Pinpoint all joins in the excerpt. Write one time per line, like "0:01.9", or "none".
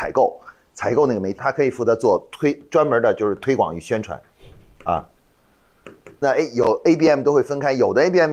0:01.4
0:06.2